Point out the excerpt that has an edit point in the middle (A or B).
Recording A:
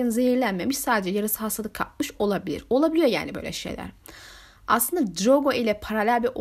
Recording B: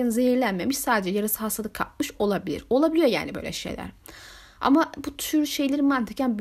B